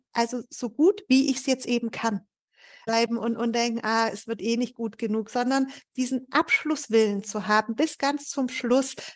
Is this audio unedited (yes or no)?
no